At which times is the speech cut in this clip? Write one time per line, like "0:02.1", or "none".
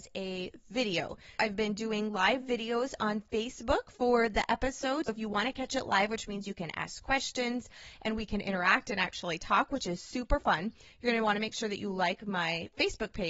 none